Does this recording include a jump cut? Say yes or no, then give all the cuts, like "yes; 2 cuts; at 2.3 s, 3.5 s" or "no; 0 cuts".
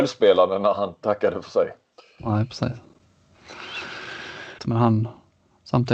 yes; 1 cut; at 4.6 s